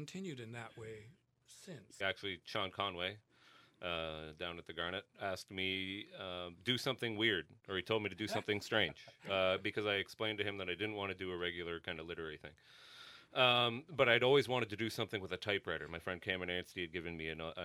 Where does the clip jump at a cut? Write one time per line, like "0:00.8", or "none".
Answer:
0:02.0